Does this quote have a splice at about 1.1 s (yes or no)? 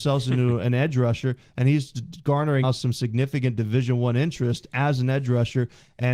no